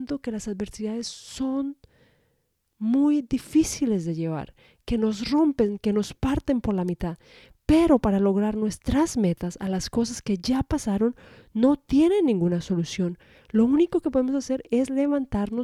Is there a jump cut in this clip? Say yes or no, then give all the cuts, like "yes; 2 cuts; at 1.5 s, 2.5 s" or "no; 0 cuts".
no; 0 cuts